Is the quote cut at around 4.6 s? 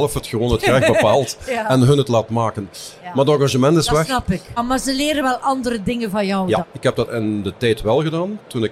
yes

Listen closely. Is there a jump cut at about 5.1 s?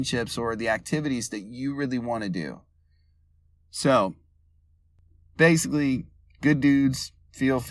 no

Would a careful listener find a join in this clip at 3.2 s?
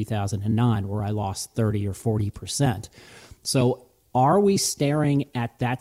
no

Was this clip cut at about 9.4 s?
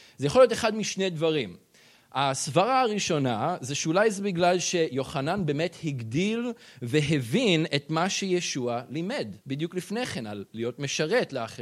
yes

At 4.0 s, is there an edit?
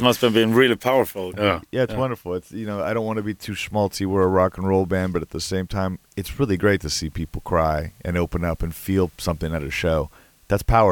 no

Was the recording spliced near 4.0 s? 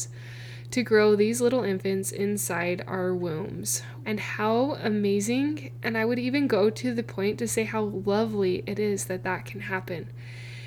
yes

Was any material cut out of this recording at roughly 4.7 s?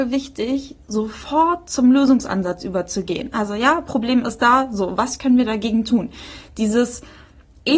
no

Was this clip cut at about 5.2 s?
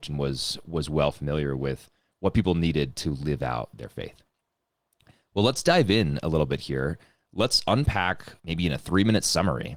no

